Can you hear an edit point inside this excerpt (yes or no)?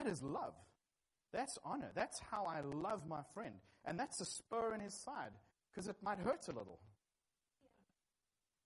no